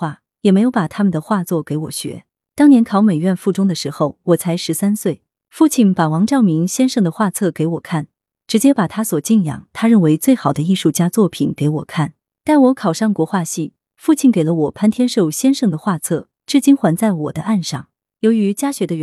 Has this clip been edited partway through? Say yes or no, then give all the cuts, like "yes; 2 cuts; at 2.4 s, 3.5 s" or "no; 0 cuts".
no; 0 cuts